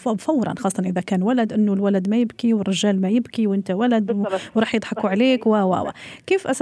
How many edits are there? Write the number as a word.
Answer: zero